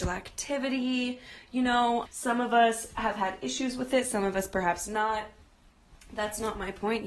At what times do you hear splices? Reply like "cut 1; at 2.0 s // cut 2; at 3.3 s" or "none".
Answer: cut 1; at 2.1 s

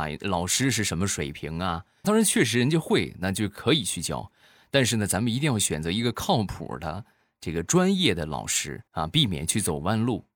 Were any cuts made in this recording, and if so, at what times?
cut 1; at 2.0 s // cut 2; at 8.9 s

